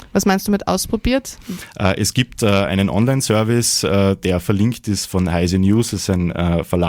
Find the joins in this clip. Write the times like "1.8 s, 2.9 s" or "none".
none